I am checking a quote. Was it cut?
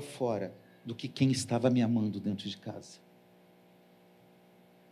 no; 0 cuts

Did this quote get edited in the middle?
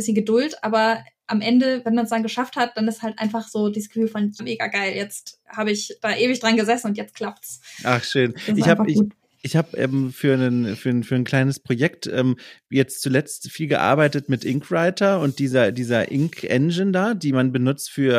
yes; 1 cut; at 4.4 s

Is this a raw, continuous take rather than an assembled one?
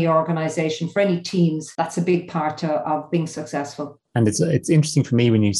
yes; 0 cuts

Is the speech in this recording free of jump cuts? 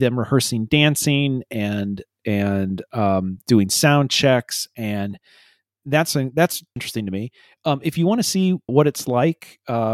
no; 2 cuts; at 6.8 s, 8.7 s

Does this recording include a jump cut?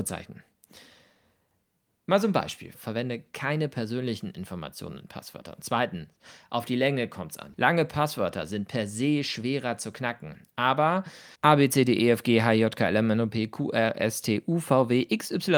yes; 3 cuts; at 2.7 s, 7.5 s, 11.3 s

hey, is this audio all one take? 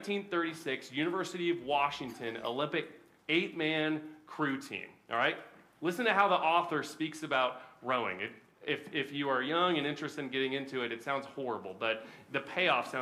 yes; 0 cuts

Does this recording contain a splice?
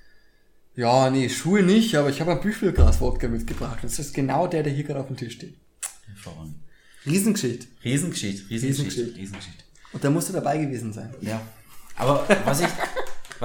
no; 0 cuts

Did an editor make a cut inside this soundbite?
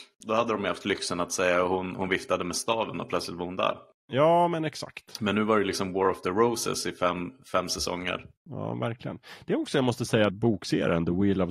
yes; 1 cut; at 10.3 s

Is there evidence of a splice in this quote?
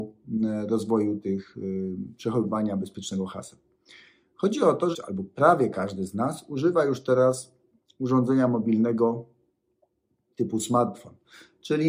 yes; 1 cut; at 4.9 s

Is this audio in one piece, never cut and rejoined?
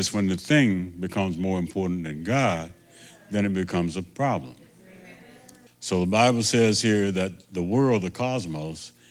no; 1 cut; at 5.7 s

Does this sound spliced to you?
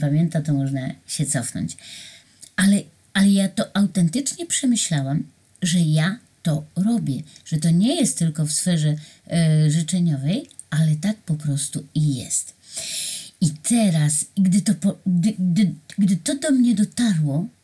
no; 0 cuts

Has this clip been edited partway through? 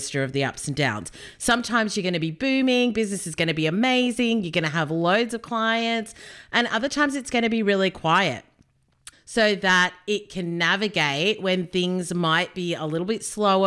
yes; 1 cut; at 9.1 s

